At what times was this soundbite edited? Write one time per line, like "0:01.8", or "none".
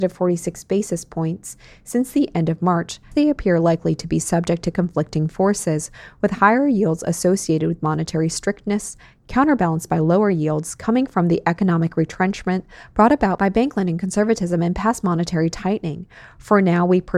0:03.1